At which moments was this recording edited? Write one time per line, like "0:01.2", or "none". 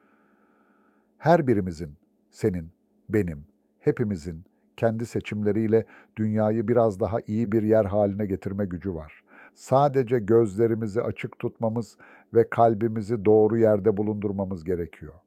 none